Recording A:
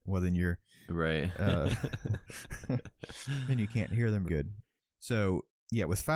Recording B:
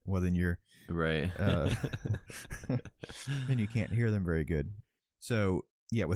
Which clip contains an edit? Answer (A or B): A